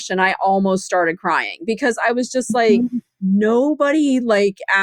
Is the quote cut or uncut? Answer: uncut